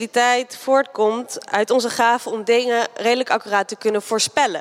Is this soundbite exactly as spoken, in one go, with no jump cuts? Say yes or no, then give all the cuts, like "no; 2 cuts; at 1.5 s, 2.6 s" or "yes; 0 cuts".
yes; 0 cuts